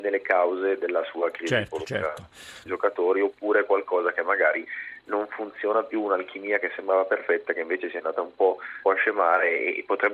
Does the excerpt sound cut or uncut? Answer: cut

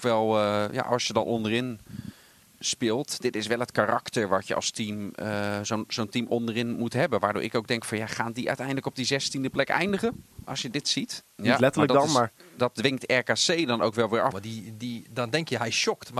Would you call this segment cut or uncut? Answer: cut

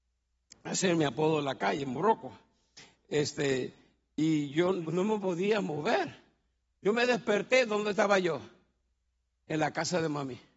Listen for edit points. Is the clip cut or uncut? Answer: cut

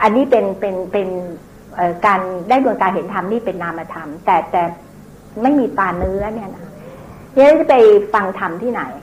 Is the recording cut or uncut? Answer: uncut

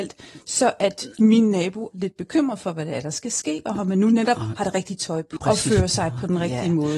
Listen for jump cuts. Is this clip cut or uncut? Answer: cut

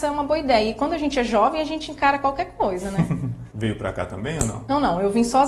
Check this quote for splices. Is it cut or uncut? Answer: cut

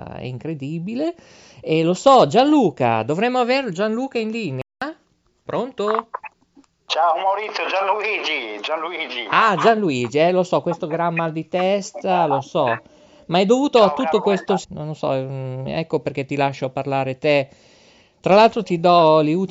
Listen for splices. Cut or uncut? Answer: cut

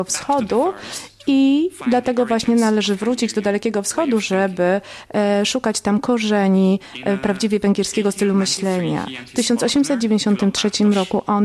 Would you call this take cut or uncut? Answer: uncut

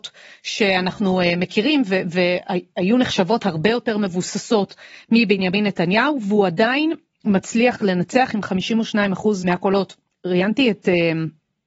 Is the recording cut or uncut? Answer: uncut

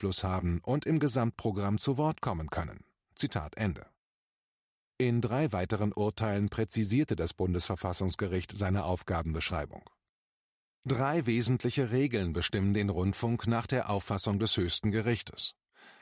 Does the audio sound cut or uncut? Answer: uncut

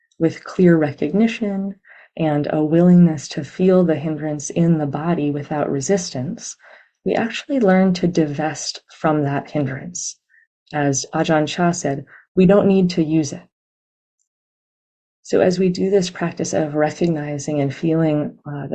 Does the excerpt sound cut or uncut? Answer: cut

